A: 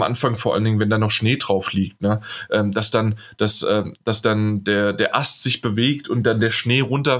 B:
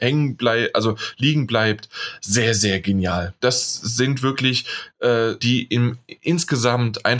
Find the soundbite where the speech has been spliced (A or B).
B